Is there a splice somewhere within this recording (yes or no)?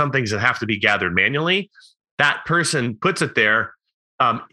no